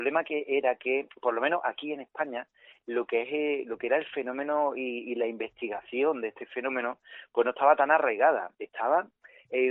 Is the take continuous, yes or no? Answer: yes